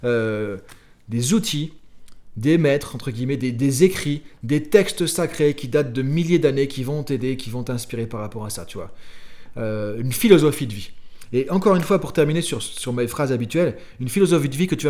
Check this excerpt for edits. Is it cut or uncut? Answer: uncut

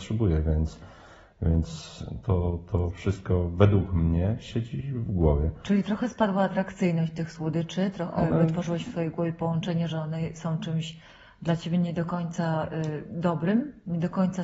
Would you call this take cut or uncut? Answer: uncut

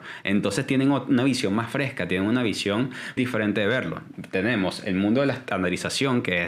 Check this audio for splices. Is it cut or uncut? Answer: cut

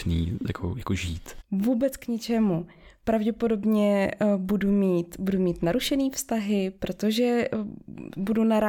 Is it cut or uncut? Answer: cut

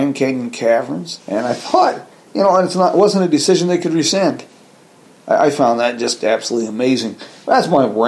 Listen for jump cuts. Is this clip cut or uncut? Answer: cut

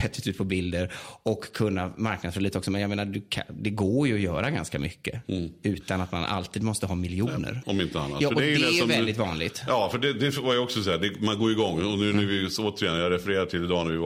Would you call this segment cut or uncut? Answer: cut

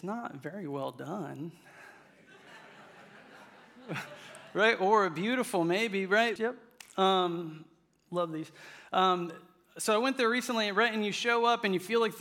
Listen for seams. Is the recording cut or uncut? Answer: cut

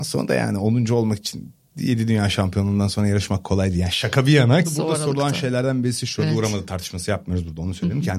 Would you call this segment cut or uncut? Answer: cut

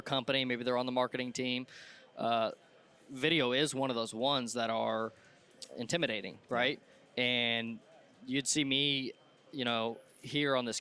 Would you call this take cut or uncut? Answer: uncut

